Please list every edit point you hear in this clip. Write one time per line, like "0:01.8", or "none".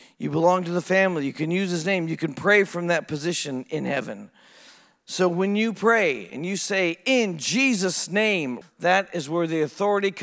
0:08.6